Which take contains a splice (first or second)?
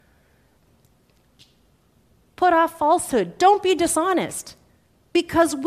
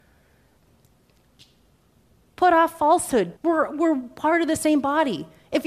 second